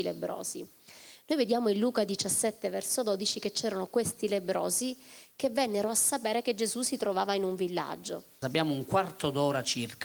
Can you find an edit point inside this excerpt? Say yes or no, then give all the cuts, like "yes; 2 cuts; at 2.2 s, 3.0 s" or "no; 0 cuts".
yes; 1 cut; at 8.4 s